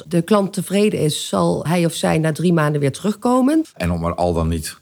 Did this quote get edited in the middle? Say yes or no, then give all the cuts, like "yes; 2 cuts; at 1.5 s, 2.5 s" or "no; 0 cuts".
yes; 2 cuts; at 1.7 s, 3.6 s